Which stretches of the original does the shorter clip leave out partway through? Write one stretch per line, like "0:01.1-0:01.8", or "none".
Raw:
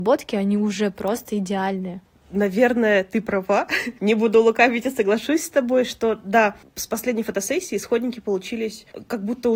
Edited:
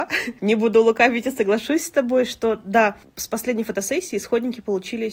none